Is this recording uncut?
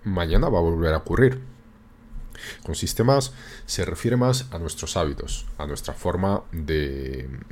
no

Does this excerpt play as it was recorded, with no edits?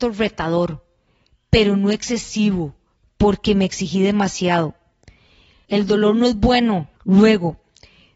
no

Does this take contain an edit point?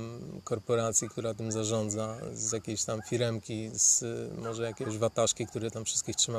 no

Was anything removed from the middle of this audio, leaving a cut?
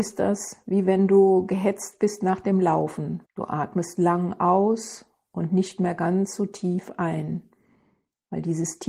yes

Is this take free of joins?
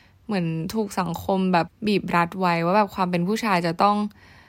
no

